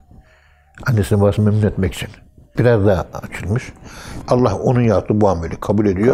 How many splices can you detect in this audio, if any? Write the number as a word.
two